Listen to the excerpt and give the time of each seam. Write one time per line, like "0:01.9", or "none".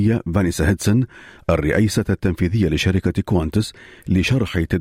none